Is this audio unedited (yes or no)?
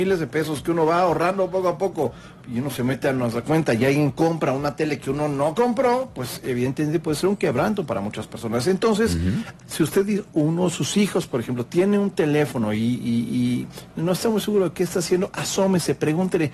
no